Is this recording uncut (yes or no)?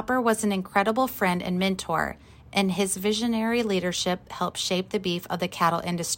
yes